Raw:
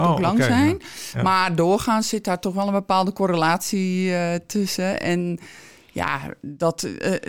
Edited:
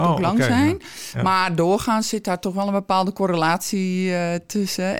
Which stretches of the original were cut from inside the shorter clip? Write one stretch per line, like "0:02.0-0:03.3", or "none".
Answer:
none